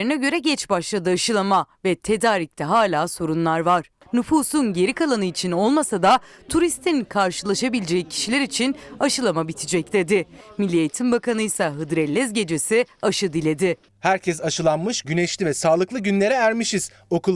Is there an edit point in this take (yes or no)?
yes